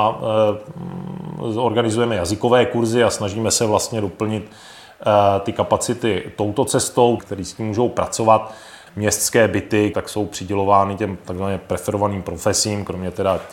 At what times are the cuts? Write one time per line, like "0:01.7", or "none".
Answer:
0:07.2
0:08.9
0:09.9